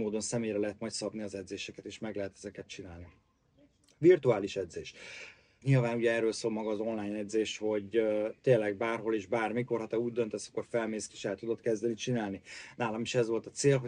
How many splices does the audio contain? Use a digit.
2